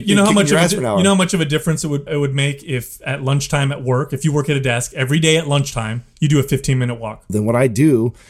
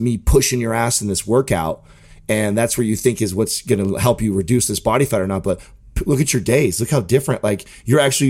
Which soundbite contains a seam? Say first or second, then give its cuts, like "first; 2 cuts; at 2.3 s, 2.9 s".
first; 2 cuts; at 2.1 s, 7.3 s